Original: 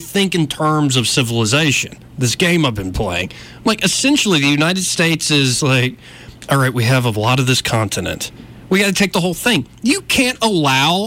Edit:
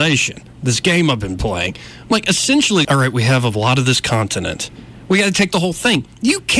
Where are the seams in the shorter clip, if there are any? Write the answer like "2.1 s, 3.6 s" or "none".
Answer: 2.8 s